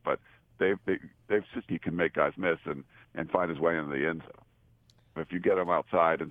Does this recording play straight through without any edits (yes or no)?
no